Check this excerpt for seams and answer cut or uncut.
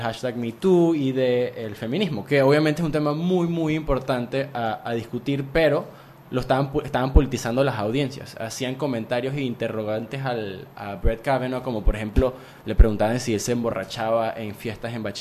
uncut